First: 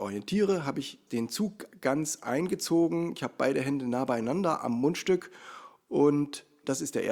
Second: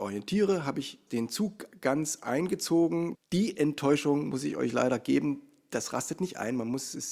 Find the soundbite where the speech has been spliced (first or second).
second